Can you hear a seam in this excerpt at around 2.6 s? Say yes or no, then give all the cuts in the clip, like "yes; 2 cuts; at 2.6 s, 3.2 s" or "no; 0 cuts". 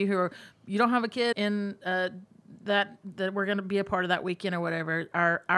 no; 1 cut; at 1.3 s